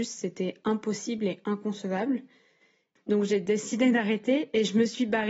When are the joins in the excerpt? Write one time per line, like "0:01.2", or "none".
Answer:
0:03.0